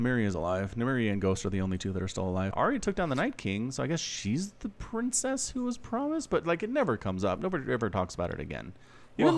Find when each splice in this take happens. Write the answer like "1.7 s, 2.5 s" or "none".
2.5 s